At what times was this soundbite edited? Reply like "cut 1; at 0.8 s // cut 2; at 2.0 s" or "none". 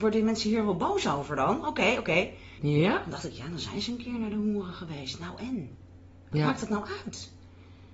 cut 1; at 2.6 s